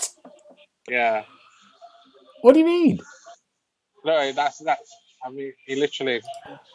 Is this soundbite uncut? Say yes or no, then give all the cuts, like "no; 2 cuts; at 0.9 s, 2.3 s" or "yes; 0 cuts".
yes; 0 cuts